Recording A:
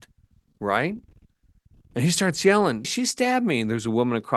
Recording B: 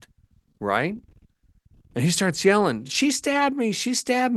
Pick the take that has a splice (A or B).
A